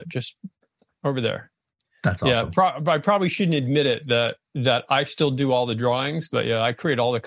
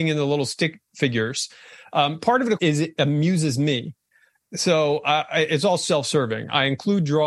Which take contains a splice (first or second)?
second